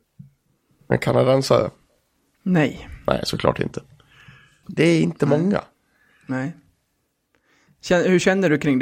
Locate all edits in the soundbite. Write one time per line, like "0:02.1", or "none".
0:04.6